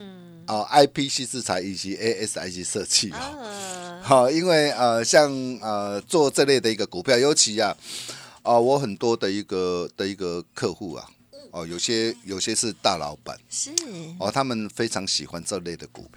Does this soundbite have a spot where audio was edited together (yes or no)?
no